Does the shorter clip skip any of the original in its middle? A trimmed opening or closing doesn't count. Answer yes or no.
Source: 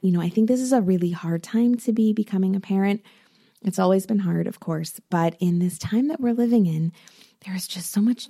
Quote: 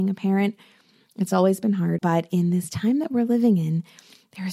yes